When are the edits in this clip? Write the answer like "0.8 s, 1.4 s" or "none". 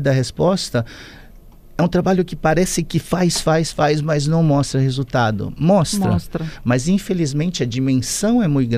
none